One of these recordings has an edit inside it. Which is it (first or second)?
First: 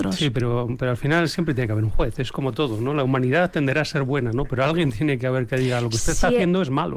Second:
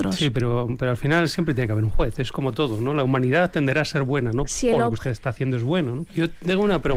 second